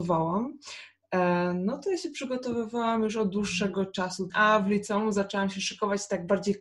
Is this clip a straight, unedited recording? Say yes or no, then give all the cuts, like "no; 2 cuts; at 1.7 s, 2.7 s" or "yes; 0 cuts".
no; 1 cut; at 4.3 s